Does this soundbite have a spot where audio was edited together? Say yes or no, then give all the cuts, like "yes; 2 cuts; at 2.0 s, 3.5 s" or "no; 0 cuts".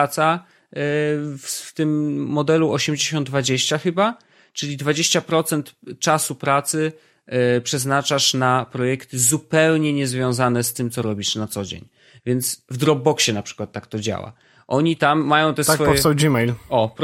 no; 0 cuts